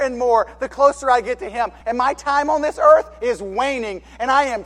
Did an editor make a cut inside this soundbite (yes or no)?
no